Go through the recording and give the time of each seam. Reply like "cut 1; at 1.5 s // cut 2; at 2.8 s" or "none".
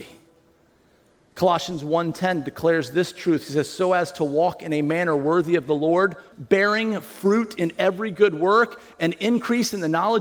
cut 1; at 6.3 s